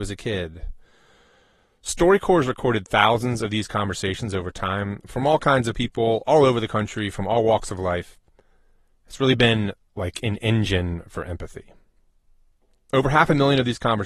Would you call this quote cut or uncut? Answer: uncut